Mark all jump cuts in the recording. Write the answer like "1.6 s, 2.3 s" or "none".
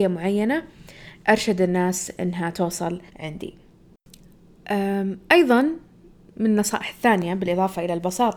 3.1 s